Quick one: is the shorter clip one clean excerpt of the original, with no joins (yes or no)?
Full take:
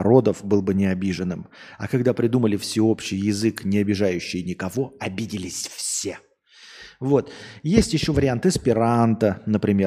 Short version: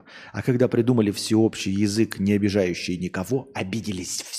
yes